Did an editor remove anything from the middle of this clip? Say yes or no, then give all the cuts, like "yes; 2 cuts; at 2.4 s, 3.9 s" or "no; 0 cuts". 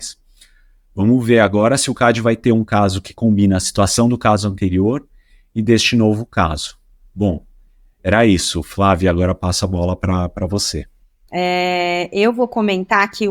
yes; 1 cut; at 11.3 s